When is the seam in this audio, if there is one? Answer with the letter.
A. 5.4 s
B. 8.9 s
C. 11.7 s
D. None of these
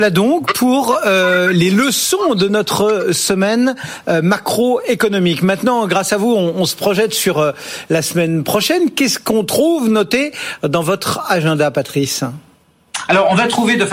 D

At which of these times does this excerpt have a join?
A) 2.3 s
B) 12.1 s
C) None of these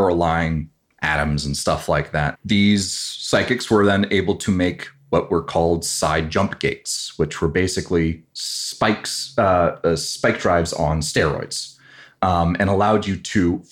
A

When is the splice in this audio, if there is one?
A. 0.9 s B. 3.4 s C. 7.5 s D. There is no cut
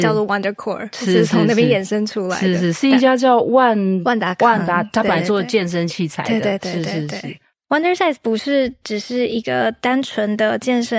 C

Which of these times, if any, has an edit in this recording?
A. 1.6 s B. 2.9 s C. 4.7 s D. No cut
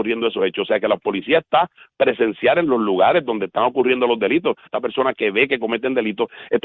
C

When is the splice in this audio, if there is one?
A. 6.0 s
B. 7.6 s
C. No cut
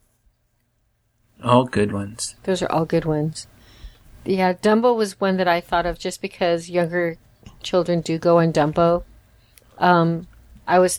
B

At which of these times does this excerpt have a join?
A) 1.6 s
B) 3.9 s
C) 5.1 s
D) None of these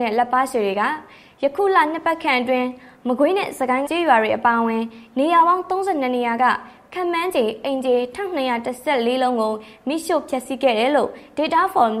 B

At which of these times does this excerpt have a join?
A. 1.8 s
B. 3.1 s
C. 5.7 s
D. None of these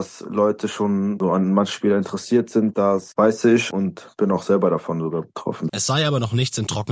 C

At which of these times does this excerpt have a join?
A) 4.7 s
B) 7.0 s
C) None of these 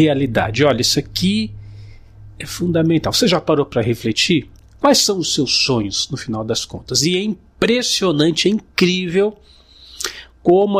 C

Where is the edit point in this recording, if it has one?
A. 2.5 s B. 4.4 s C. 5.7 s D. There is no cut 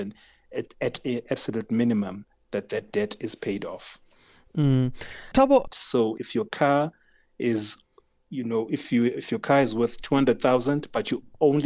C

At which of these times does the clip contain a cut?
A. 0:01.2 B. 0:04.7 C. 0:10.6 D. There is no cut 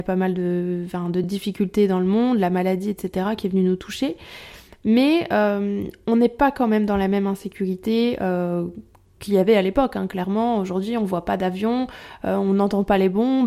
D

